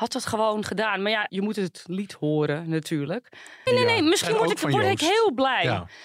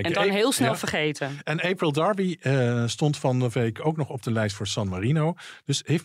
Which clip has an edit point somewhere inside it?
first; 2 cuts; at 1.3 s, 3.7 s

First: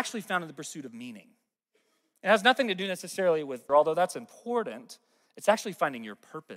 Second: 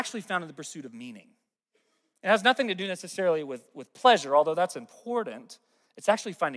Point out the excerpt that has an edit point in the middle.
first; 1 cut; at 3.7 s

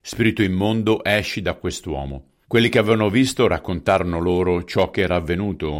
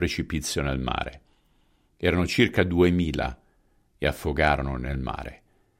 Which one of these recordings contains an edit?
first; 1 cut; at 2.4 s

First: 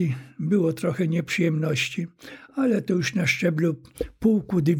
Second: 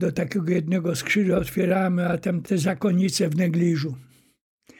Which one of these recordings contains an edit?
second; 1 cut; at 2.4 s

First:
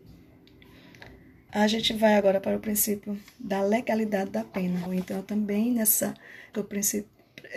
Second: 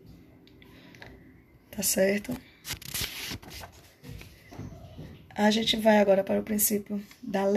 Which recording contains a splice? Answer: first; 3 cuts; at 1.5 s, 4.9 s, 6.5 s

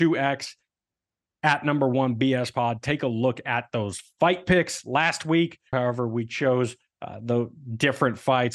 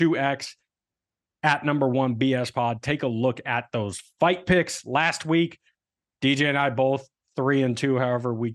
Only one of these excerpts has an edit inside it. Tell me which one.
first; 1 cut; at 5.7 s

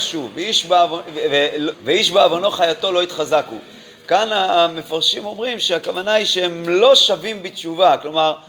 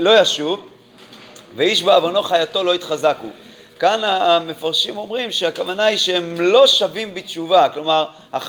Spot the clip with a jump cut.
first; 1 cut; at 1.7 s

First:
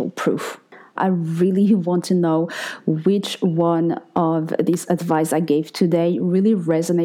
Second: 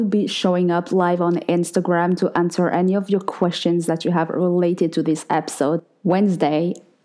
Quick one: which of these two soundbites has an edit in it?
first; 1 cut; at 1.0 s

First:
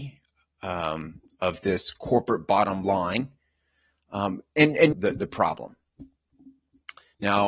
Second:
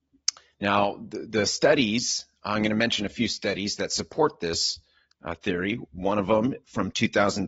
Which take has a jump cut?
first; 1 cut; at 4.9 s

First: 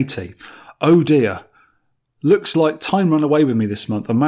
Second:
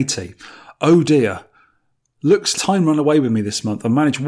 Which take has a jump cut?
second; 1 cut; at 2.5 s

